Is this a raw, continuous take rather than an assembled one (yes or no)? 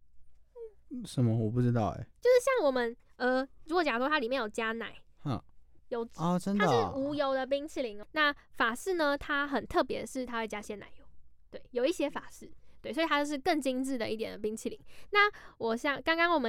no